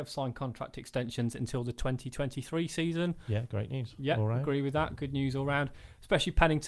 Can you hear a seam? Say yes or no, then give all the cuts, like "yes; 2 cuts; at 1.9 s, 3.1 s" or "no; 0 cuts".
no; 0 cuts